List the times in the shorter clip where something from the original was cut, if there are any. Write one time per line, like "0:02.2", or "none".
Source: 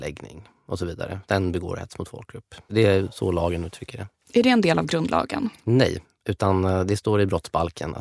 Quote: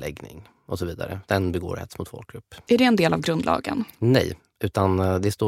0:02.7